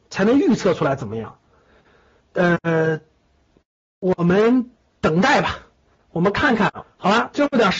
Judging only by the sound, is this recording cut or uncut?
cut